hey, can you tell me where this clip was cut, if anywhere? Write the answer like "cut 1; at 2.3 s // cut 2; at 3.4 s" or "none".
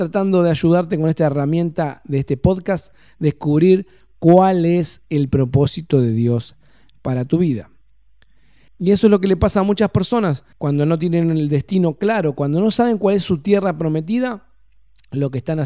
cut 1; at 8.7 s // cut 2; at 10.5 s